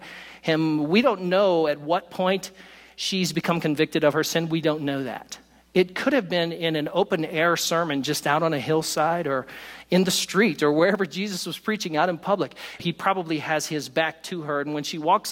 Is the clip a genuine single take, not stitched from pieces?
no; 1 cut; at 12.8 s

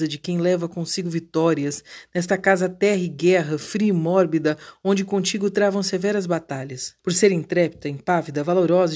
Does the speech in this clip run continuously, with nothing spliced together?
no; 1 cut; at 7.0 s

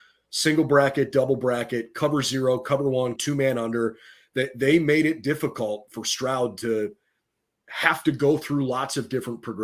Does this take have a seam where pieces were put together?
yes; 1 cut; at 3.2 s

